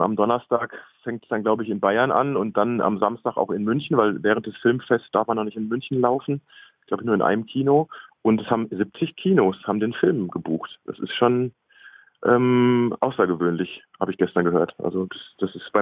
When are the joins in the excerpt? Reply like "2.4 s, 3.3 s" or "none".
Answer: none